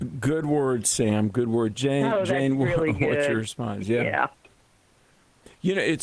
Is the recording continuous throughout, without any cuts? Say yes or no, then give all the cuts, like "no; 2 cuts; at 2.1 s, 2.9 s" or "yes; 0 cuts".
yes; 0 cuts